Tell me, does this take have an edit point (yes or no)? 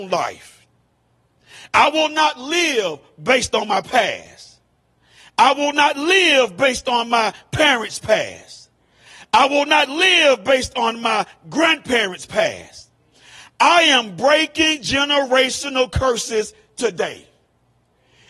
no